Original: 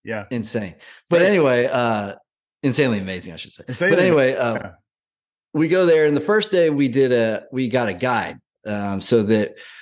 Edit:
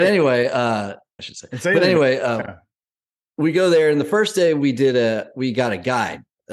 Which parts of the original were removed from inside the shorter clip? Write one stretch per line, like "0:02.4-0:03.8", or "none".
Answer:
0:02.4-0:03.3